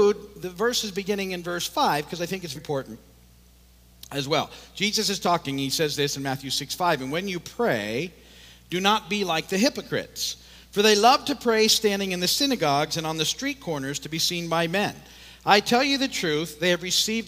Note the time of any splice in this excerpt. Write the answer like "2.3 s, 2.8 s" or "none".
2.6 s